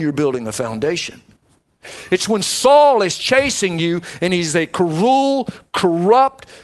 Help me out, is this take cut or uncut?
uncut